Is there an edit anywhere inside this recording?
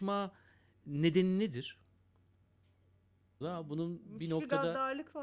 yes; 1 cut; at 3.4 s

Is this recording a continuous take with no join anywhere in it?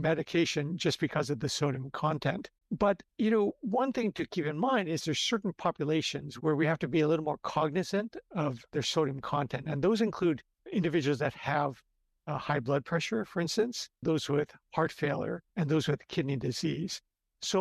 no; 2 cuts; at 14.0 s, 15.5 s

